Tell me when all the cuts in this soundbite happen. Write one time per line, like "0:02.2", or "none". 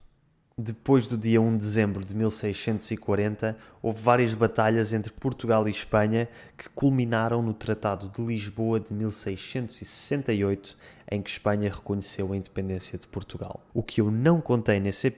0:13.7

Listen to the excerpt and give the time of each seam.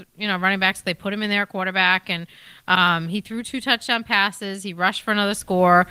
none

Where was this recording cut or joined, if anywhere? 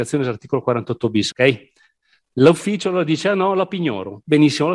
0:01.3

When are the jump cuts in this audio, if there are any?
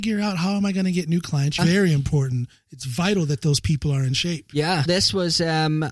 0:01.6
0:04.9

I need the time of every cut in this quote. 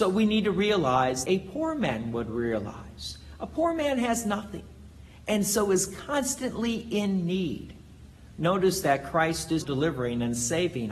0:01.2
0:08.3
0:09.6

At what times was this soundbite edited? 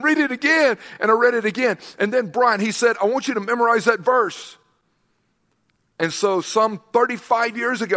none

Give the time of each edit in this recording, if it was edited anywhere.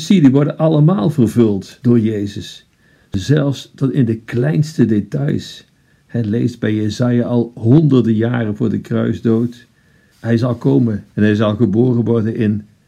0:10.1

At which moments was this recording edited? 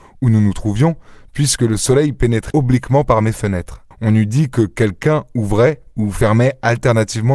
0:02.5
0:03.9

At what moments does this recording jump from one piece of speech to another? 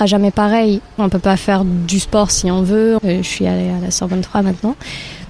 0:01.0
0:03.0

